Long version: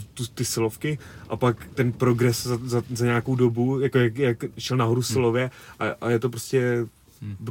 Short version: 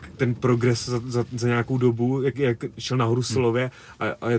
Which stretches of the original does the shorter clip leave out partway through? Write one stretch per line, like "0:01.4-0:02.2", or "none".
0:03.9-0:04.1